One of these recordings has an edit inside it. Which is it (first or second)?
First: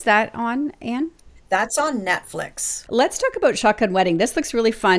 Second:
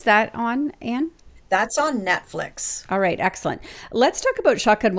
first